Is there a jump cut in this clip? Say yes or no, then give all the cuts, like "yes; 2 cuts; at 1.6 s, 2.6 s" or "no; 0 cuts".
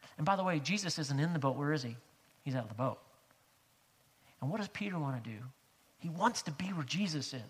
no; 0 cuts